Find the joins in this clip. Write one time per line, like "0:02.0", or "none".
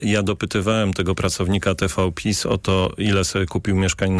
none